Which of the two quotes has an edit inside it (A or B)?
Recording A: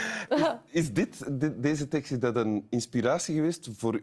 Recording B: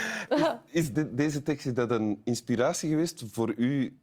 B